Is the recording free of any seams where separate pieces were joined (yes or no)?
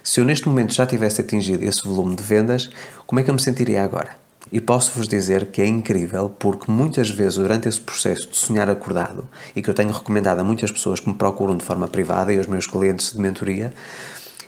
no